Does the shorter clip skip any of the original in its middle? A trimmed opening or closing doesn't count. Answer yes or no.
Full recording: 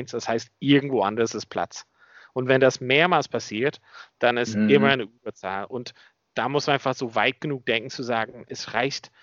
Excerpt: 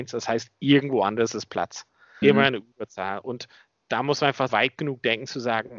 yes